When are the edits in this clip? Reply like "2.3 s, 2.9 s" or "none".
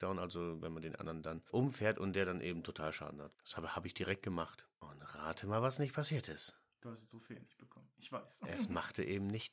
none